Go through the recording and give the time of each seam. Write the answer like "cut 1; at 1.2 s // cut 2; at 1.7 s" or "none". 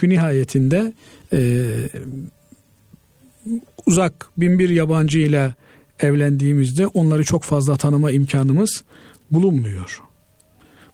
none